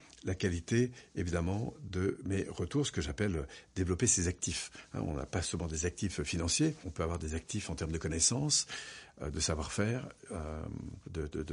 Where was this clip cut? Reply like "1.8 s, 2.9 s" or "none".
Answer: none

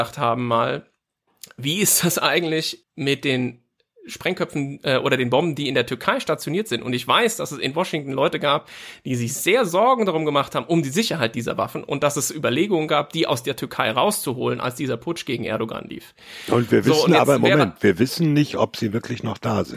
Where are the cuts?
2.8 s

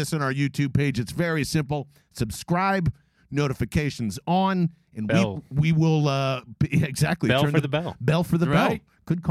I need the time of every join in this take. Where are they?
none

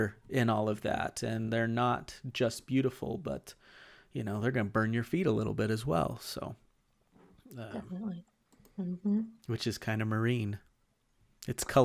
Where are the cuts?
none

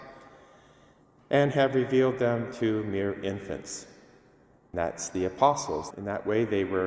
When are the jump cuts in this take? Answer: 5.9 s

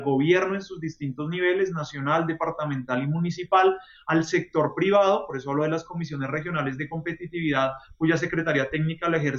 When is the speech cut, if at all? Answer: none

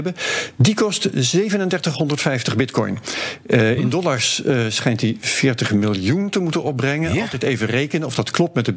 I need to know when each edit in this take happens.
none

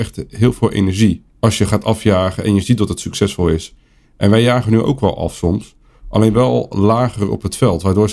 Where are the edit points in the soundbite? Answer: 1.3 s

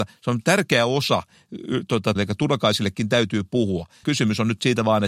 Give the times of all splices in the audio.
2.2 s, 4.0 s

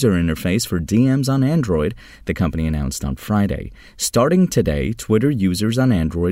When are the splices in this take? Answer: none

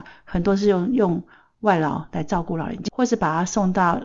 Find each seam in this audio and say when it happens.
2.9 s

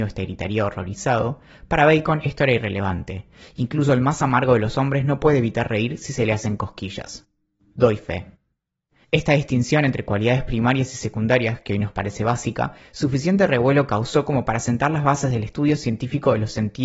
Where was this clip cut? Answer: 9.0 s

